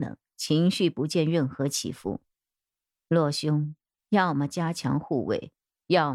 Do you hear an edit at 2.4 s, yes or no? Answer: no